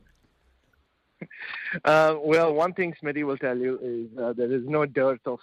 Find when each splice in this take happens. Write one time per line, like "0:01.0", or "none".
none

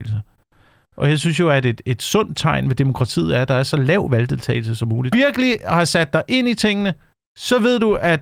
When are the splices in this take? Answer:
0:05.1

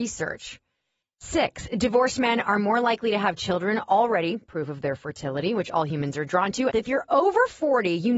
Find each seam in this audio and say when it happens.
0:01.0
0:06.7

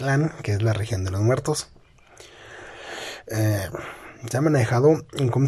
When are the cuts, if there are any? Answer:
none

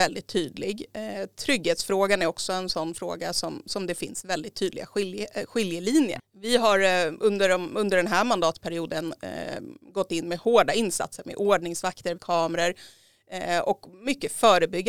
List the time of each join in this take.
0:06.2
0:12.2

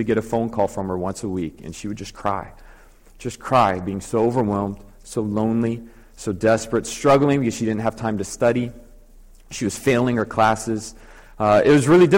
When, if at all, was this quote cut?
none

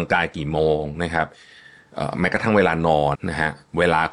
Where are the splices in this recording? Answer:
0:03.1

